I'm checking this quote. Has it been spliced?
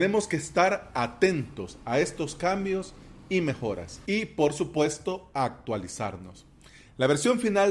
no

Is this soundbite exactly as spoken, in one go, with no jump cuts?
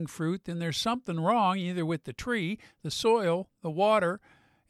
yes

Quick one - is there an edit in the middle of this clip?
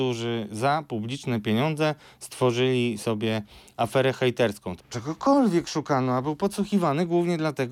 yes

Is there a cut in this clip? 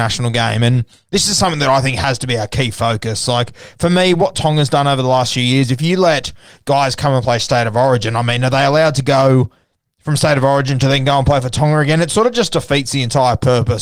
no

